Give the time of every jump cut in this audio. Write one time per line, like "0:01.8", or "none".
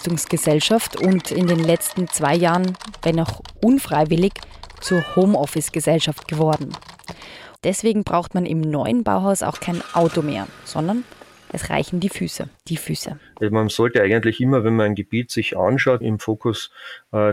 0:07.6
0:12.5
0:16.0